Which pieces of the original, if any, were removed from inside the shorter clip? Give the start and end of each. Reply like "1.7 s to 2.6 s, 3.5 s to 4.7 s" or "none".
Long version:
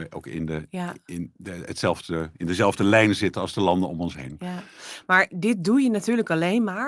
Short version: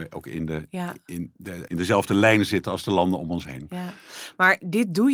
1.7 s to 2.4 s